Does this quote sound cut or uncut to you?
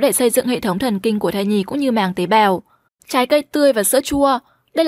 cut